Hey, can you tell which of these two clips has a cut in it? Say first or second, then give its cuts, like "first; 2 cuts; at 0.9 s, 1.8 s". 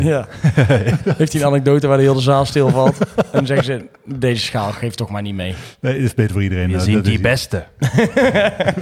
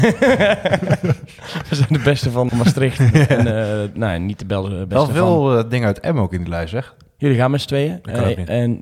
second; 2 cuts; at 2.5 s, 7.2 s